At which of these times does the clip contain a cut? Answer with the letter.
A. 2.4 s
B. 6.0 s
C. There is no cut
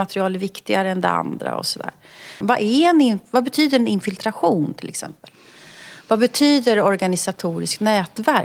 A